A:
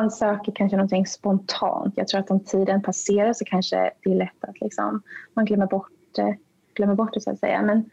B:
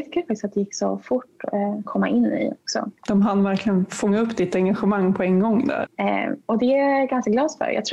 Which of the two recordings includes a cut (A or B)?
B